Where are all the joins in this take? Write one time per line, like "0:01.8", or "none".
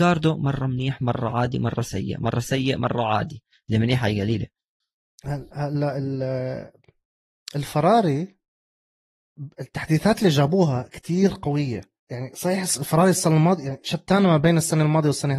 0:12.0